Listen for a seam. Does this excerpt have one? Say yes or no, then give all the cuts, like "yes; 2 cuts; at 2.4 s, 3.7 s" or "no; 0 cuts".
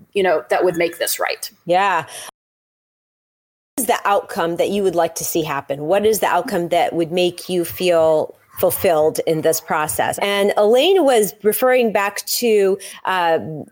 yes; 1 cut; at 10.2 s